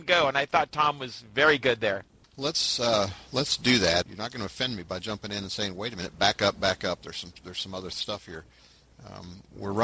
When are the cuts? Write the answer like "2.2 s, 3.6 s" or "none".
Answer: 4.0 s